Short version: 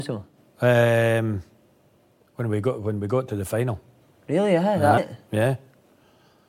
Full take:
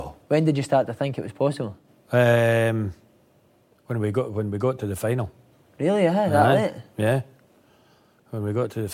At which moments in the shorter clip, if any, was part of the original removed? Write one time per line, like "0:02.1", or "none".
0:05.0